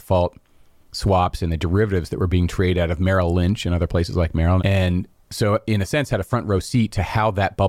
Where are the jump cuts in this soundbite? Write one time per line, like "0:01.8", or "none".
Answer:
0:04.6